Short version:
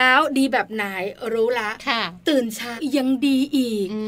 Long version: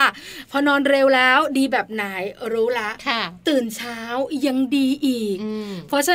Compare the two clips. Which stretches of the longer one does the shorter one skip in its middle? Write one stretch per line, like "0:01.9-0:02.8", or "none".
0:04.0-0:04.3